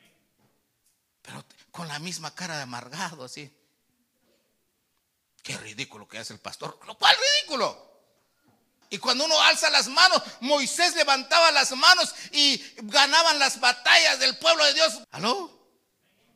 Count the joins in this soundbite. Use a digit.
2